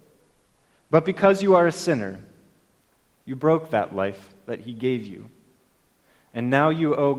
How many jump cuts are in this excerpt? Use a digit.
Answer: 0